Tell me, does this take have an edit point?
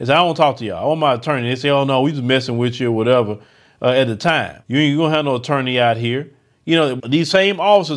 yes; 2 cuts; at 4.6 s, 7.0 s

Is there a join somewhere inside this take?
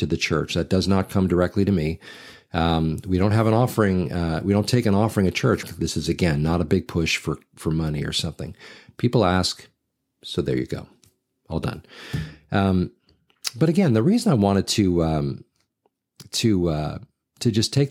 yes; 1 cut; at 5.6 s

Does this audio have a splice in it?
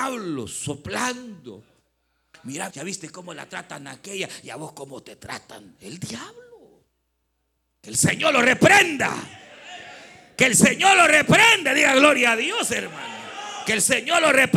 yes; 1 cut; at 2.7 s

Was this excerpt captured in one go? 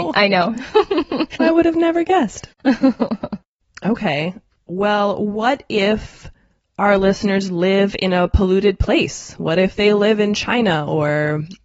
no; 1 cut; at 1.4 s

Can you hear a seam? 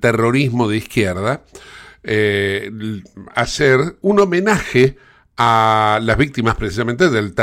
yes; 1 cut; at 3.3 s

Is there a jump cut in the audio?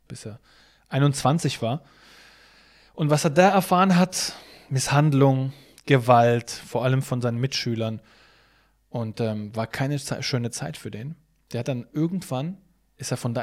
no; 0 cuts

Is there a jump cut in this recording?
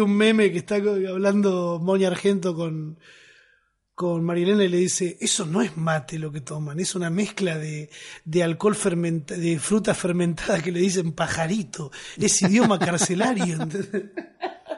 no; 0 cuts

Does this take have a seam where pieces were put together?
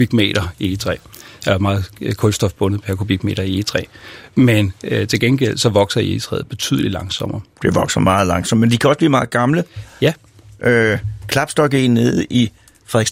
no; 0 cuts

